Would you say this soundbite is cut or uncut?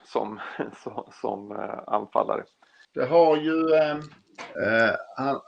cut